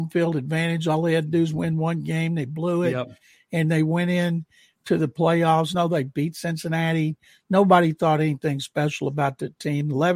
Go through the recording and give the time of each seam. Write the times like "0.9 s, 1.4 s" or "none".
5.7 s